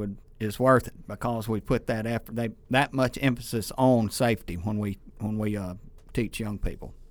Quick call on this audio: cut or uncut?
uncut